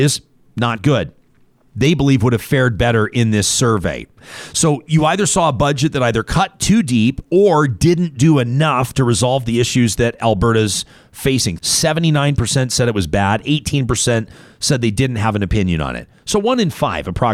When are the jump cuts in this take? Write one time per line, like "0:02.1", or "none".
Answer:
0:01.7
0:11.6